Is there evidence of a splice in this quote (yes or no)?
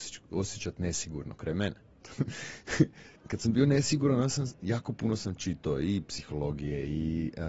yes